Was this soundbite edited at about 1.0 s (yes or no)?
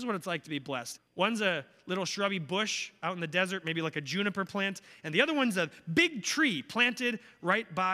yes